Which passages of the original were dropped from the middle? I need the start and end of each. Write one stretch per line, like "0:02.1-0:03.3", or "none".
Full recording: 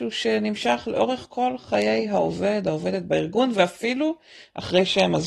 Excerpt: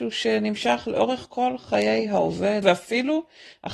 0:02.6-0:03.5